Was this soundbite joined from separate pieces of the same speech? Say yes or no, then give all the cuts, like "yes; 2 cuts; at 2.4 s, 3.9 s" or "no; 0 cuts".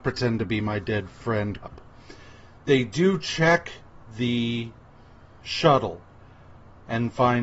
yes; 1 cut; at 1.6 s